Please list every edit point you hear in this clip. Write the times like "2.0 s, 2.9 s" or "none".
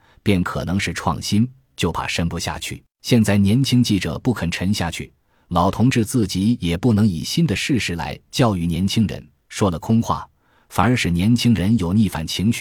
2.9 s